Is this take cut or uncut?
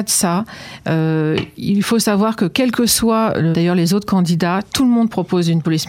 cut